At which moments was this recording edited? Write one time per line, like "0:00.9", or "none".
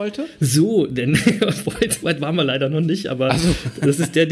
0:02.0